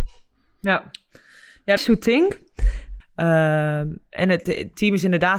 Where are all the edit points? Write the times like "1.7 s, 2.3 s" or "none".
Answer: 1.8 s, 3.0 s